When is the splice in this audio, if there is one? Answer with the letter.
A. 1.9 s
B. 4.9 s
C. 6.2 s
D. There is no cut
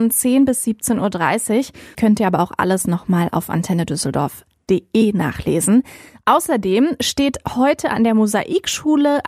A